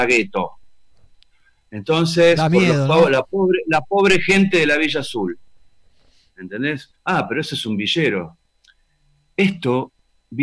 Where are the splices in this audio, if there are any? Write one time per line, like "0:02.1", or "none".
0:06.9